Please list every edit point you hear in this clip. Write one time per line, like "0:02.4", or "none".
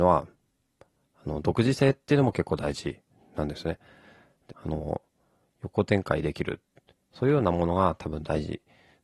0:04.5